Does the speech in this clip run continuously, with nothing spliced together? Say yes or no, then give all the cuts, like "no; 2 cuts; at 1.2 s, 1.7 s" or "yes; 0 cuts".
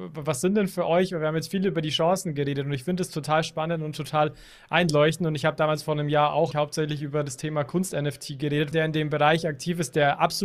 no; 2 cuts; at 6.5 s, 8.7 s